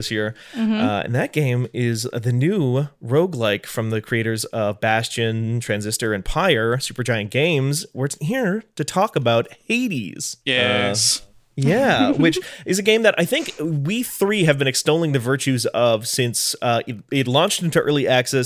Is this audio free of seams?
no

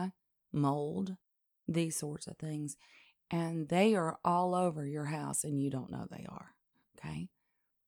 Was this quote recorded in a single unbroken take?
yes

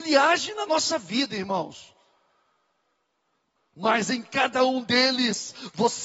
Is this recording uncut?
no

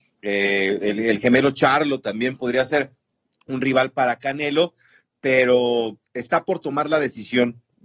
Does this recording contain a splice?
no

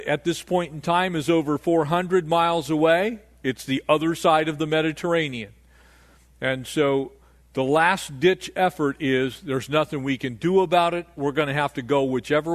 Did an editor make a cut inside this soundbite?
no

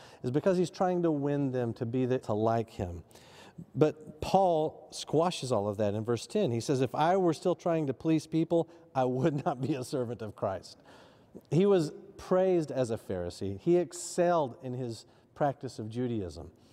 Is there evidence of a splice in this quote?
yes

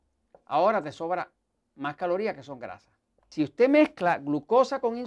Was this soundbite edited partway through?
yes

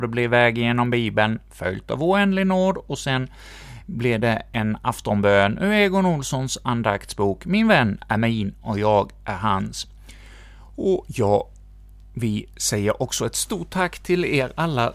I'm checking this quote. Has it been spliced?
no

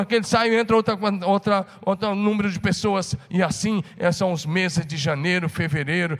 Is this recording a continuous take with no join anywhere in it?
yes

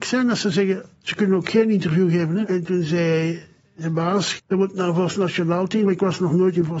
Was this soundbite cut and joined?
yes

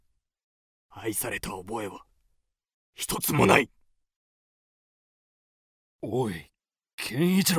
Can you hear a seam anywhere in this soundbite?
no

